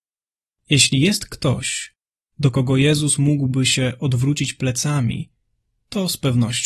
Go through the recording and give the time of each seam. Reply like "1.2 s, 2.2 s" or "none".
none